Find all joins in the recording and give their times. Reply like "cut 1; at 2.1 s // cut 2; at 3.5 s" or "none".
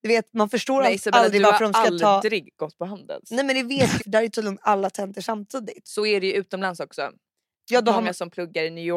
cut 1; at 4.0 s // cut 2; at 5.8 s